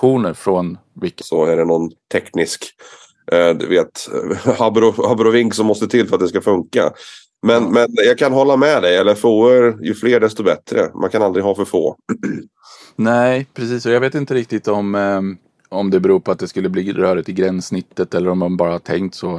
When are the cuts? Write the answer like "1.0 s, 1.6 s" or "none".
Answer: 1.2 s